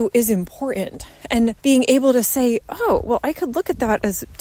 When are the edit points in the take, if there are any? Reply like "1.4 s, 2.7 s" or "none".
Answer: 1.6 s